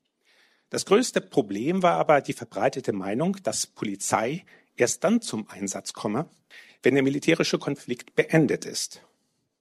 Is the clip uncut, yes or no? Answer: yes